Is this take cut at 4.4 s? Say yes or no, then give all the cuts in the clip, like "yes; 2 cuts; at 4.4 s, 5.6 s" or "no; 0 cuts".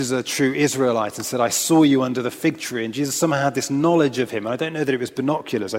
no; 0 cuts